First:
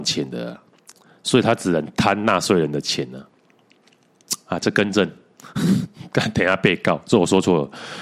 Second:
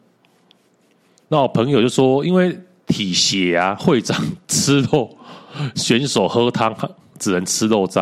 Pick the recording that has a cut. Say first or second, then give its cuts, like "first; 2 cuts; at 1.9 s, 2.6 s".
second; 1 cut; at 5.7 s